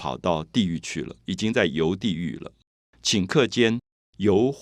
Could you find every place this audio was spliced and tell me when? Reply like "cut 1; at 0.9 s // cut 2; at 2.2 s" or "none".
none